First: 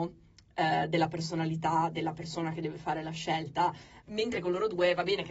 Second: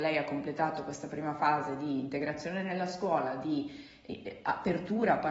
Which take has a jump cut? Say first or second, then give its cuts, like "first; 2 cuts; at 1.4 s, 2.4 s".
first; 1 cut; at 4.0 s